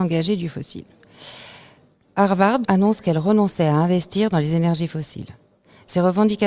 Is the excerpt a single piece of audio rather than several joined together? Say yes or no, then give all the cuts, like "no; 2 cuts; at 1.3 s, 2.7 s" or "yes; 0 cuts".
no; 1 cut; at 2.6 s